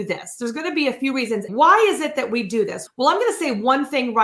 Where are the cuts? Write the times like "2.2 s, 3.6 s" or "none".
1.5 s, 2.9 s